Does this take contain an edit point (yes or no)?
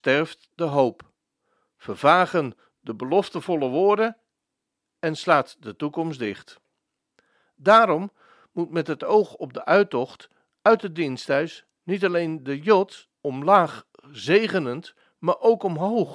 yes